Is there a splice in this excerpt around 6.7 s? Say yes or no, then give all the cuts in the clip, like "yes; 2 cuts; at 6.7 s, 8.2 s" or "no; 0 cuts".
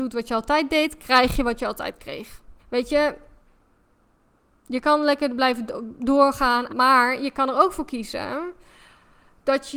yes; 2 cuts; at 2.6 s, 6.7 s